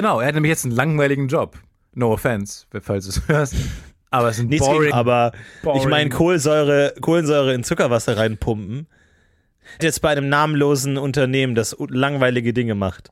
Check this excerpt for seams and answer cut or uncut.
cut